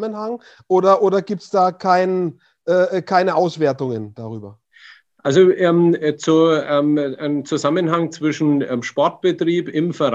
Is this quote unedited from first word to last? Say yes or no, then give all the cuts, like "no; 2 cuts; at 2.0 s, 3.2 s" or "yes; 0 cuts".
yes; 0 cuts